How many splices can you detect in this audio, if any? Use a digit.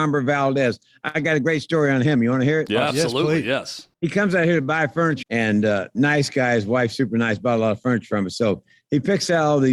2